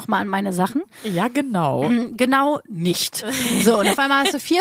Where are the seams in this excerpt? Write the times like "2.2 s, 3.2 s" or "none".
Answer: none